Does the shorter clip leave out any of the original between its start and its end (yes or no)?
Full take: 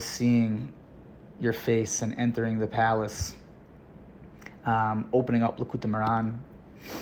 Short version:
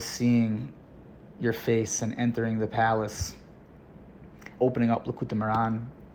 yes